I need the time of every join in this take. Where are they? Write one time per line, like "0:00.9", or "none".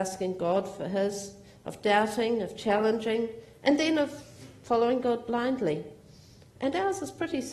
none